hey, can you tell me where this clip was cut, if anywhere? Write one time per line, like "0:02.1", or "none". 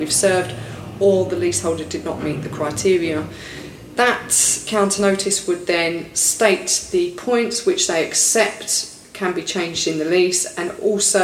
none